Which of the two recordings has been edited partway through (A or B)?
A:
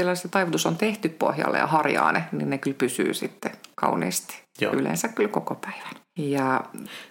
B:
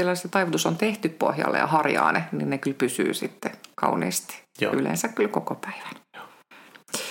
A